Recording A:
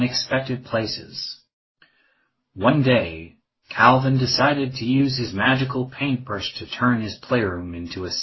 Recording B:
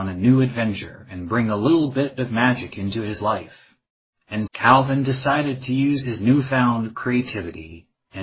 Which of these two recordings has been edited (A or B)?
B